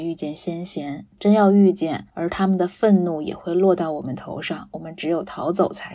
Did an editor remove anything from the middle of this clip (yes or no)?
yes